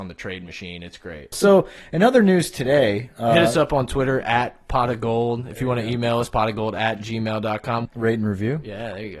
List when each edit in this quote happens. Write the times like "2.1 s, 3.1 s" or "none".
1.3 s, 7.9 s